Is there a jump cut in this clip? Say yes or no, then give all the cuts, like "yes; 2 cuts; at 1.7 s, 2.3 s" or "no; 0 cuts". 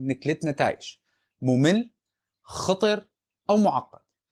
no; 0 cuts